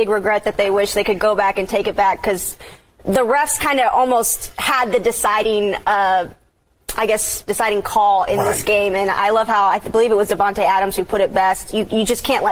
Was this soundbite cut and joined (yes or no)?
yes